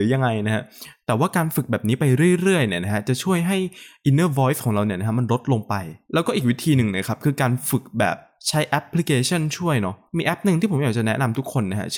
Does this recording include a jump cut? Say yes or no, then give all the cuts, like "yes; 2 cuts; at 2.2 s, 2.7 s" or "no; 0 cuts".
no; 0 cuts